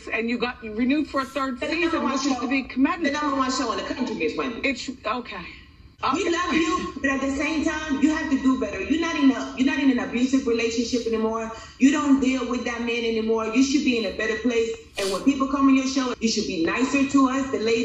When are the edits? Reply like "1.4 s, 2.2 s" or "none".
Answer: 16.1 s